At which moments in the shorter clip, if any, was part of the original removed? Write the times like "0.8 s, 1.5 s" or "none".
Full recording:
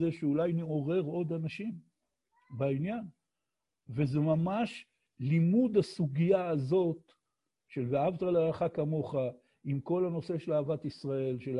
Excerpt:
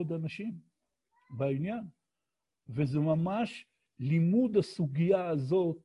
none